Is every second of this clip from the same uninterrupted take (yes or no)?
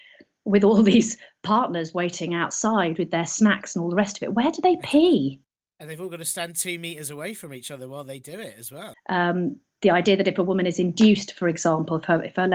no